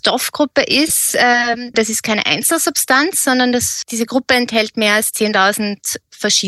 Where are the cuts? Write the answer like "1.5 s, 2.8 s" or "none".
1.7 s, 3.8 s